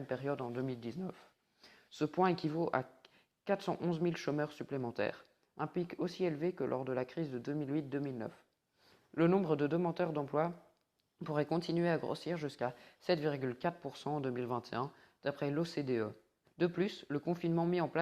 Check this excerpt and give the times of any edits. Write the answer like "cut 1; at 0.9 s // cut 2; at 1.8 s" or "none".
cut 1; at 16.4 s

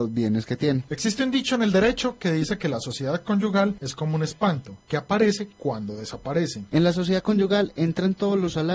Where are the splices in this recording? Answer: cut 1; at 6.7 s

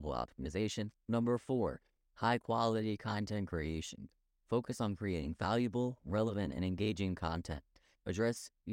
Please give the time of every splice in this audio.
cut 1; at 0.9 s

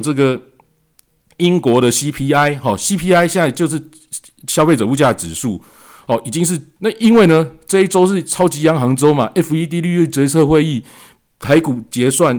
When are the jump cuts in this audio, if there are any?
cut 1; at 6.8 s

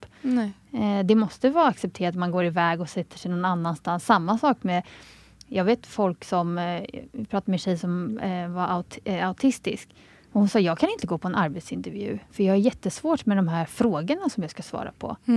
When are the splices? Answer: none

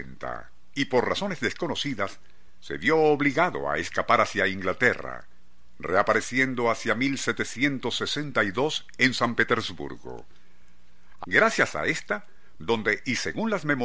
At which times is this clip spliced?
cut 1; at 11.2 s // cut 2; at 12.6 s

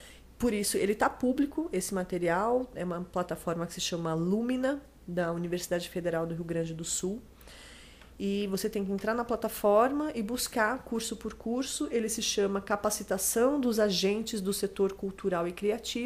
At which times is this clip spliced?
none

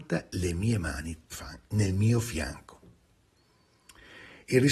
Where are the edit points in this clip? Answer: cut 1; at 1.3 s

